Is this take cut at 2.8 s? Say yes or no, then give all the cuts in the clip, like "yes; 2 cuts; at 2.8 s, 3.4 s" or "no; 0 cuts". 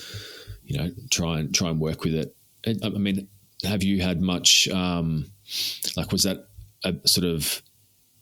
yes; 2 cuts; at 2.8 s, 7.0 s